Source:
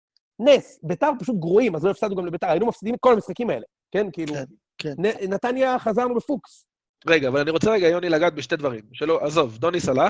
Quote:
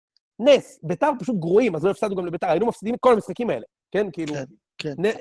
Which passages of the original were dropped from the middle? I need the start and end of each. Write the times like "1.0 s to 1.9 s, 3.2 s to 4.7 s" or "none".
none

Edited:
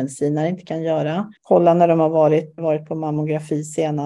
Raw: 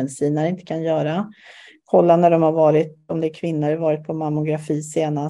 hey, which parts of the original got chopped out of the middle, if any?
1.4 s to 1.8 s, 3.0 s to 3.8 s

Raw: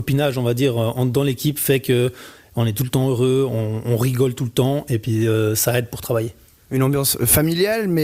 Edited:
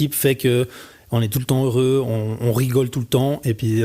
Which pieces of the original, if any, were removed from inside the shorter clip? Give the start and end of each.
none

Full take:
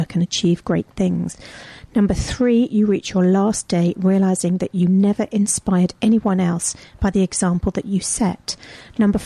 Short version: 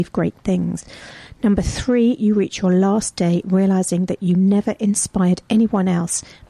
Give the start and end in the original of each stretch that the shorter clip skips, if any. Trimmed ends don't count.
none

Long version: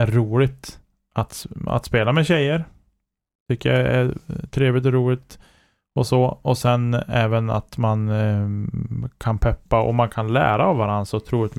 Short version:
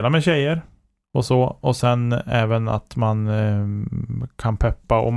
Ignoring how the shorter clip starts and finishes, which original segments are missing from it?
3.1 s to 5.8 s

